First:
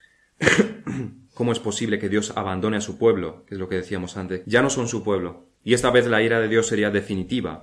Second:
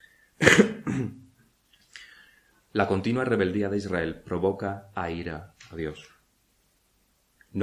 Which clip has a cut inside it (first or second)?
first